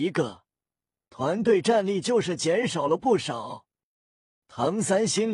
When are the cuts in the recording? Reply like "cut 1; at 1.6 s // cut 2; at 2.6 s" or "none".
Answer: cut 1; at 4.4 s